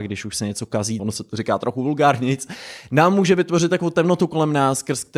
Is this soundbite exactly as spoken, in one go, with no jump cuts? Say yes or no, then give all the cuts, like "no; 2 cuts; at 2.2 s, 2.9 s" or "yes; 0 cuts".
no; 1 cut; at 1.0 s